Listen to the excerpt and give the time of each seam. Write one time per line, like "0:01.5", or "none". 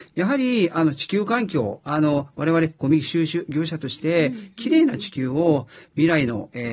none